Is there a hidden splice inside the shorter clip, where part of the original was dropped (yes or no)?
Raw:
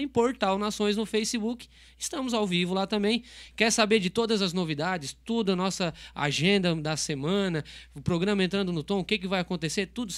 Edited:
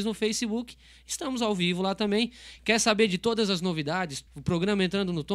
yes